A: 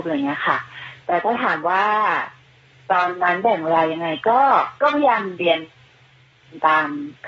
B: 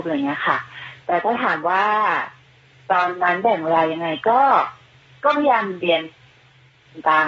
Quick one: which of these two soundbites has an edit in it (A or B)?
A